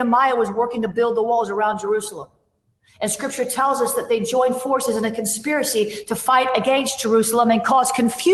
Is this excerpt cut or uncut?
uncut